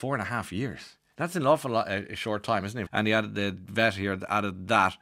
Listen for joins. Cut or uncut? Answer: cut